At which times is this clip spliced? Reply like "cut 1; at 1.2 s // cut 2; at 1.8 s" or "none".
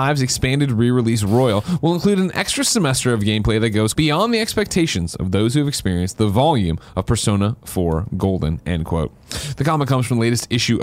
cut 1; at 3.9 s

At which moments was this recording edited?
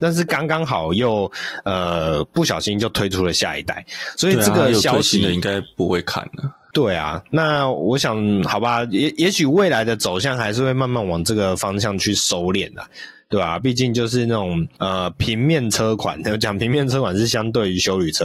none

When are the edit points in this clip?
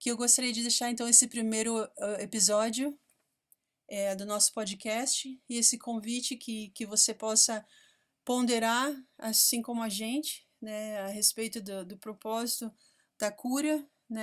none

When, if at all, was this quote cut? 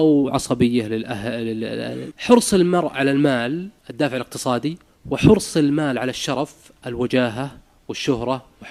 cut 1; at 2.1 s // cut 2; at 3.8 s

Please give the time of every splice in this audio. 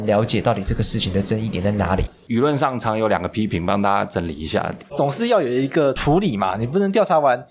cut 1; at 4.8 s

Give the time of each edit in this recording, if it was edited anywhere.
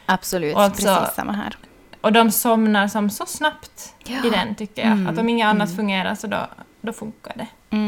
none

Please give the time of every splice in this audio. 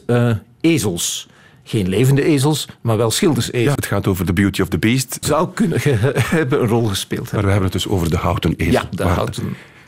cut 1; at 3.8 s // cut 2; at 5.2 s

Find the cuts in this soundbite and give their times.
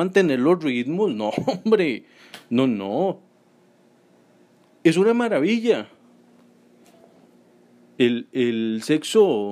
none

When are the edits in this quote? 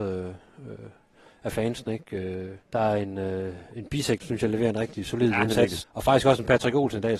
cut 1; at 2.6 s // cut 2; at 4.2 s // cut 3; at 5.8 s

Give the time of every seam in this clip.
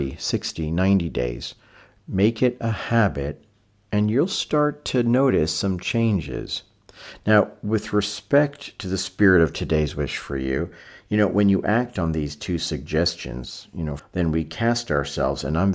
cut 1; at 2.0 s // cut 2; at 14.0 s

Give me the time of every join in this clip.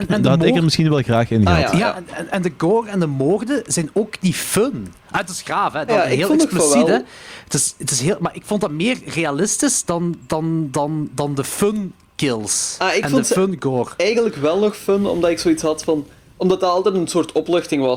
cut 1; at 5.9 s

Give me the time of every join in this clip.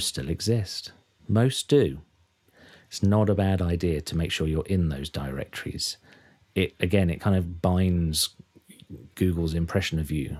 cut 1; at 1.2 s

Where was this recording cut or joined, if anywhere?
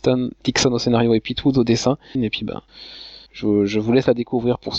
cut 1; at 2.1 s

